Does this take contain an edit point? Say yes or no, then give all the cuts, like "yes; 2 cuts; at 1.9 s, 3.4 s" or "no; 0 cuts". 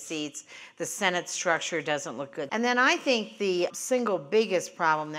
yes; 2 cuts; at 2.5 s, 3.7 s